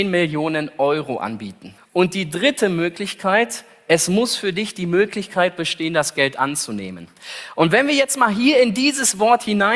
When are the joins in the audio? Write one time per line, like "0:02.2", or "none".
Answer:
0:01.8